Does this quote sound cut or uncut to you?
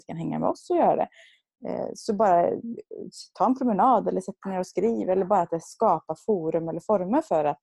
uncut